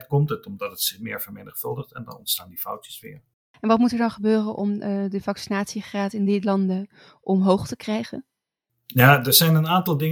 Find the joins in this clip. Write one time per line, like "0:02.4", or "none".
none